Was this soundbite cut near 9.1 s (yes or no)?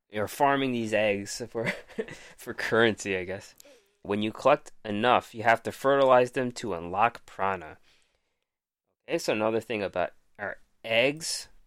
no